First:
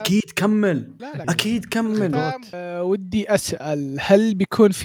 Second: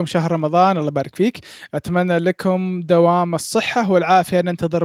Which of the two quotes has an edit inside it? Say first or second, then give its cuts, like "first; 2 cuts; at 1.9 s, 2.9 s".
first; 1 cut; at 1.2 s